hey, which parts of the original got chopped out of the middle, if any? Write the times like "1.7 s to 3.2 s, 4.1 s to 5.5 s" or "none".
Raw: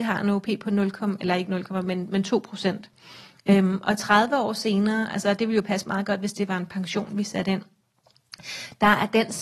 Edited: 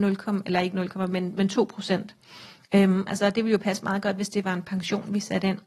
3.8 s to 5.1 s